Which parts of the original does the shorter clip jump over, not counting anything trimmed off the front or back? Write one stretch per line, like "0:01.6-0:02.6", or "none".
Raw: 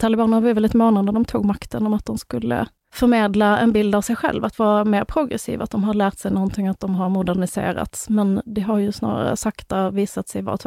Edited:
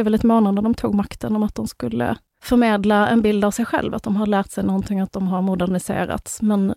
0:04.4-0:05.6